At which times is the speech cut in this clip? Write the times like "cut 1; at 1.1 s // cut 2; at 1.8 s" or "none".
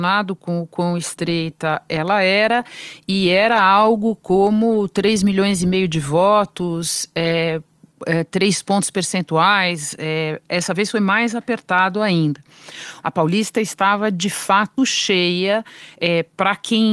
cut 1; at 13.0 s // cut 2; at 14.8 s